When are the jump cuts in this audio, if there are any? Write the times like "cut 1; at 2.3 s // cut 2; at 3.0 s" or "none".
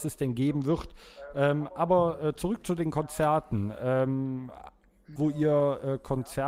cut 1; at 5.2 s